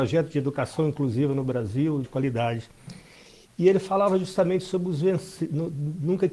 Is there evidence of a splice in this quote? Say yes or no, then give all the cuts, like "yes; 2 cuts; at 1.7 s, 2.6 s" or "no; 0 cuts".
yes; 1 cut; at 2.0 s